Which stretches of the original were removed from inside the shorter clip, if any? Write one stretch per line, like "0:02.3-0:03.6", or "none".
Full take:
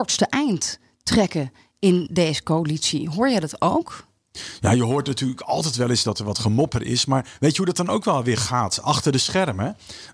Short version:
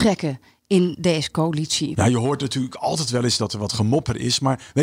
0:03.1-0:04.6